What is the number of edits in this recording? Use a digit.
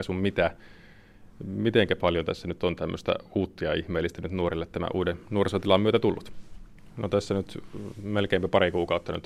1